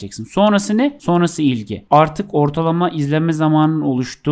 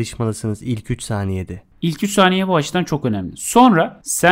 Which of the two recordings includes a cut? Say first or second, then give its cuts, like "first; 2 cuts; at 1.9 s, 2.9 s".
second; 1 cut; at 1.7 s